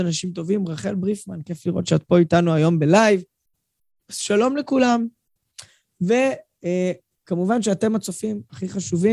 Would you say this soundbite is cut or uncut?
uncut